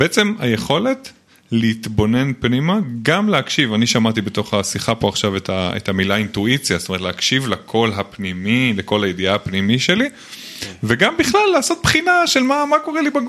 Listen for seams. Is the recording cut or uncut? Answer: uncut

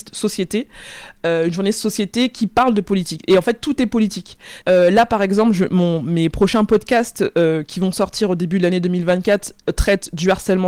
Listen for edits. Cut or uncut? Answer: cut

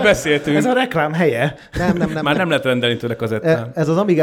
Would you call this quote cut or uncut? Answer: uncut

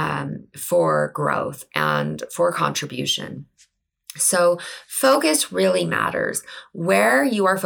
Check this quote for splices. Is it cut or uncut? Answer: uncut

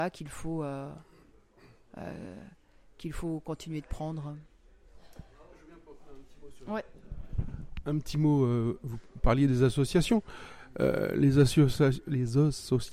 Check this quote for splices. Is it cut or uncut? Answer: uncut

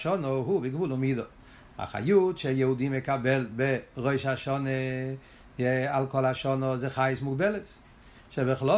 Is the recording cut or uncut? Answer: uncut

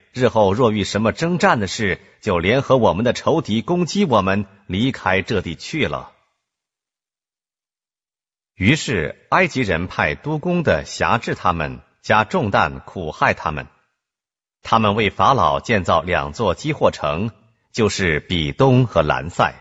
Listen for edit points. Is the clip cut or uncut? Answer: uncut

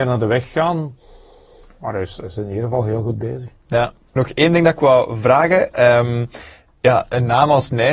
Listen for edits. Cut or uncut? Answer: cut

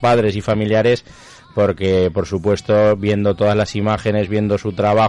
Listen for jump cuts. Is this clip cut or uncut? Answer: uncut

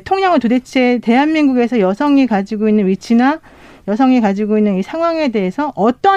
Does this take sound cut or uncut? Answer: uncut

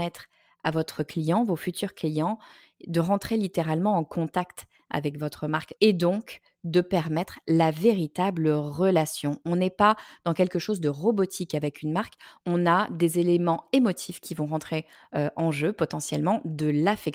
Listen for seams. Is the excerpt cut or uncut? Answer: cut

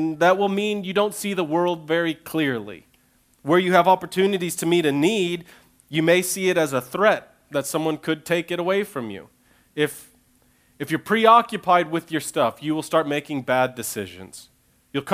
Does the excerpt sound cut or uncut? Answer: uncut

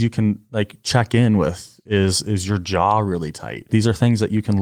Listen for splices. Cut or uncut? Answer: cut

